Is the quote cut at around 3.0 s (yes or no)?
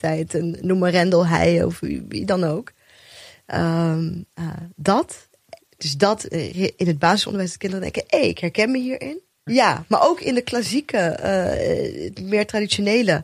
no